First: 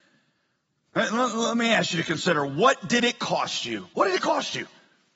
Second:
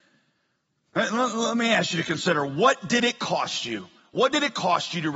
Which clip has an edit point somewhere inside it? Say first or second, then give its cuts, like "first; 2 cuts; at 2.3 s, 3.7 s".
first; 1 cut; at 3.9 s